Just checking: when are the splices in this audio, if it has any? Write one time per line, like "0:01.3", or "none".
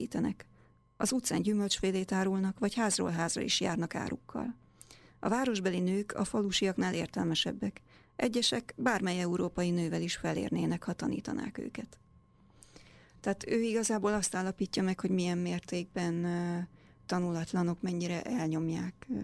0:17.8